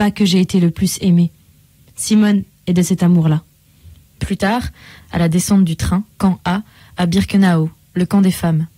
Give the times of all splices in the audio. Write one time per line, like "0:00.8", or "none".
0:05.0
0:06.2